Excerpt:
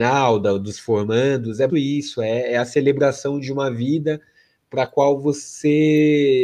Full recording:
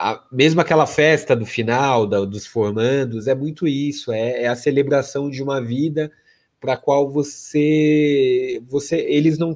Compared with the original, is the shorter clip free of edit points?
no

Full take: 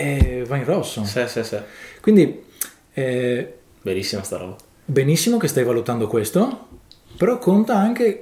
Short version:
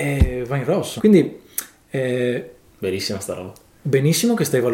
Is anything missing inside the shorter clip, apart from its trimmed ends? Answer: yes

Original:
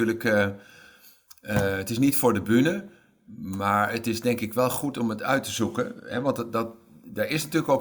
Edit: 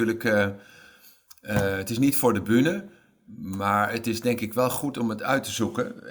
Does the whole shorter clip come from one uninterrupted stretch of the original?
yes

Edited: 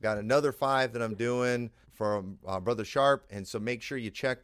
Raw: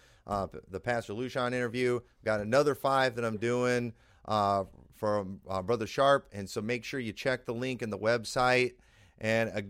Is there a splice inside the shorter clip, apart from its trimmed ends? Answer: yes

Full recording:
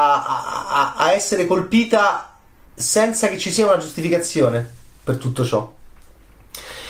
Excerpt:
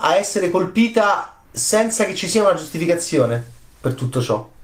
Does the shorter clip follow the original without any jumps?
no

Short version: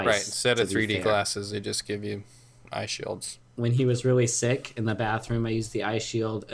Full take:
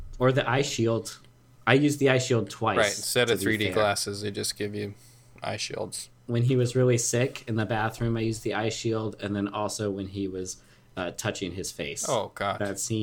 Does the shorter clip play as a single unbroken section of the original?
yes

